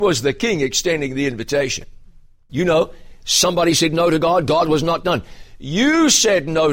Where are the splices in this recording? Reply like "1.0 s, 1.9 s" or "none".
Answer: 2.5 s